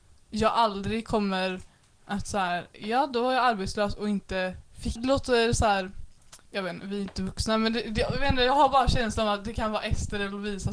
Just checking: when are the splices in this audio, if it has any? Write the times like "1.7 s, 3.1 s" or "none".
5.0 s, 6.5 s